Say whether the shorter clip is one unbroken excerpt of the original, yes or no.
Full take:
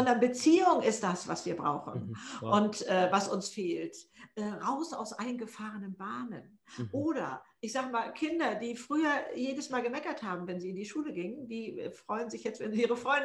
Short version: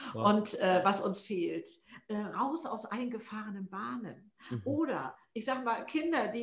yes